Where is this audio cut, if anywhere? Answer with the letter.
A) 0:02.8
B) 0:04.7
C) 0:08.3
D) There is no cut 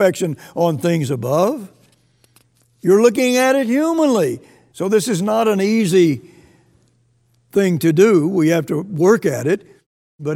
B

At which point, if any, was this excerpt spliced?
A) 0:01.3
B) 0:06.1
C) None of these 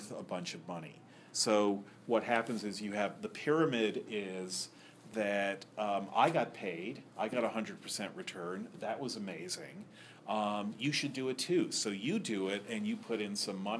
A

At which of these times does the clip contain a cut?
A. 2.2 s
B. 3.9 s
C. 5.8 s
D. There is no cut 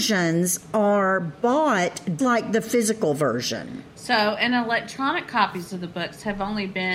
A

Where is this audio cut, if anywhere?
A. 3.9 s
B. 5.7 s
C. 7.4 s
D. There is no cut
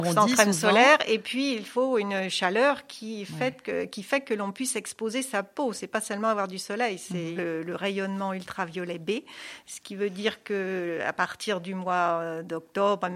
C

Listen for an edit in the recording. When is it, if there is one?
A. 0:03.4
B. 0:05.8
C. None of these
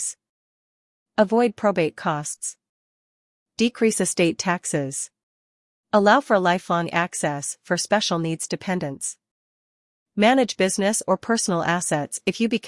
B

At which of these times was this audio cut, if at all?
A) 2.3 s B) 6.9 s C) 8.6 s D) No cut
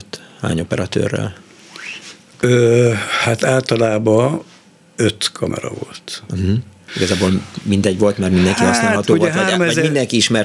B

